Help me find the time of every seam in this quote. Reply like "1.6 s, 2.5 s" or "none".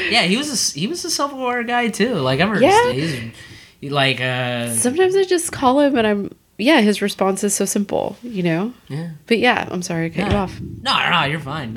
2.9 s